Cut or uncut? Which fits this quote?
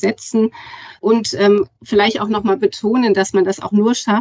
uncut